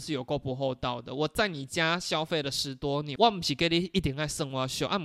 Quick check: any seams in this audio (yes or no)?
no